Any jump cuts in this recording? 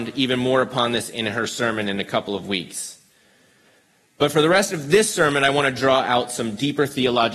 no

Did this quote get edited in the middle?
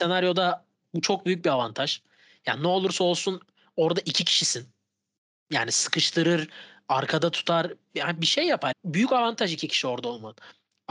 yes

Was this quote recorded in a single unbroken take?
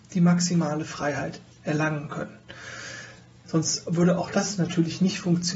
no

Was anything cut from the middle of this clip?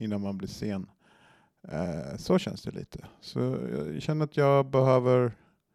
no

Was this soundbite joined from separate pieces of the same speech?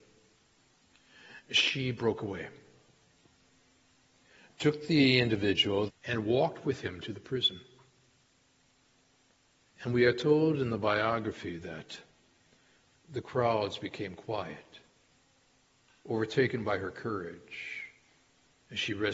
yes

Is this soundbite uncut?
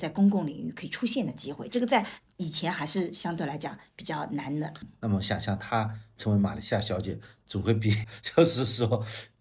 no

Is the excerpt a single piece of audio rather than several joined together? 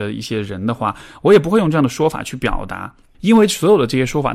no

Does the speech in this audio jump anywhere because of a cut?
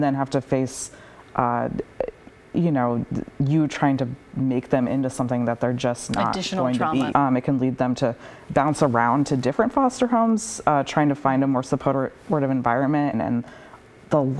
yes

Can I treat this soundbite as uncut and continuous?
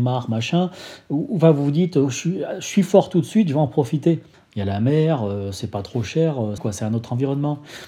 no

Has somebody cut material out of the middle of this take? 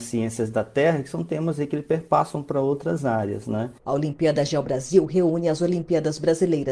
no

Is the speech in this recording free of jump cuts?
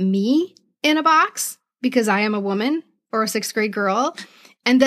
yes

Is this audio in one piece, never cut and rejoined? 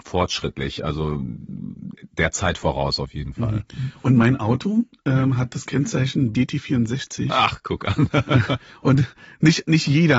yes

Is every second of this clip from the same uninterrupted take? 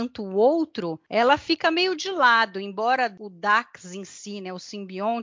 yes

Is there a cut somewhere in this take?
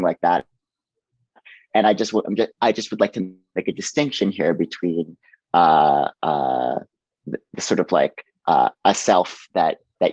no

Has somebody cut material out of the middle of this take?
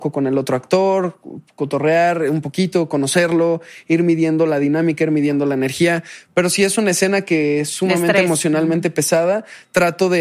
no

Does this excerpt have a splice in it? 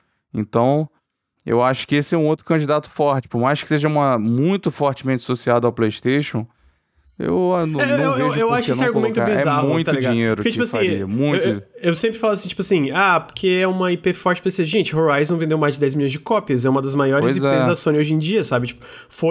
no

